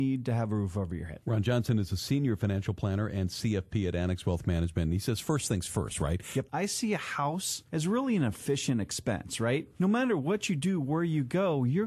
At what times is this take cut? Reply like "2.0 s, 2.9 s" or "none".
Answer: 6.5 s